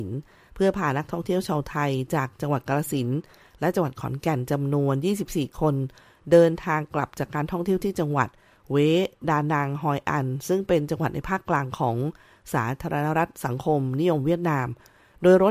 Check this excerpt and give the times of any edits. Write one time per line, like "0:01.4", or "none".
none